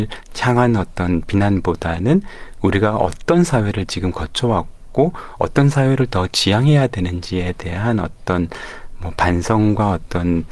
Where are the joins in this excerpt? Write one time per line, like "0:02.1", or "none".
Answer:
none